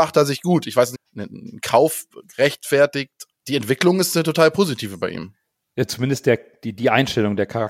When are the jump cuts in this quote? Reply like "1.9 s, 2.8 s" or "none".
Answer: 0.9 s, 3.3 s